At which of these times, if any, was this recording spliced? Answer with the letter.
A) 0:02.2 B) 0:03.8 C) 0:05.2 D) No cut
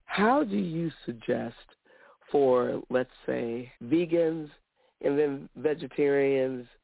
B